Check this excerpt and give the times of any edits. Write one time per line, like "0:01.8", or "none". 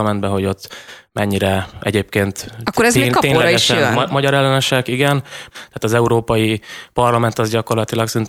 0:05.5